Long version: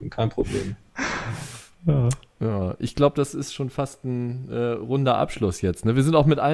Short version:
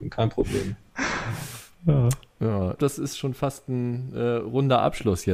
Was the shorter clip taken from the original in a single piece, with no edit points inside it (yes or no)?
no